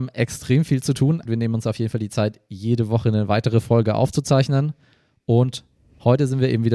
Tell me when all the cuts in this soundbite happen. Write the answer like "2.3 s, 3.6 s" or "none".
1.2 s